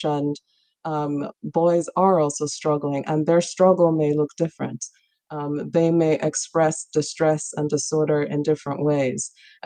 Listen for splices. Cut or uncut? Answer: uncut